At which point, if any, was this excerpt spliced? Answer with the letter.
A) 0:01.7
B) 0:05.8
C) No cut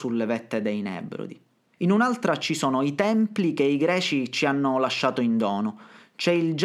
A